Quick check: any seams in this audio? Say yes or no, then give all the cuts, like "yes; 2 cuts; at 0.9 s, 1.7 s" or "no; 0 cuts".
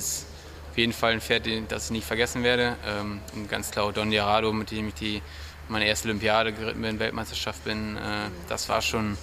no; 0 cuts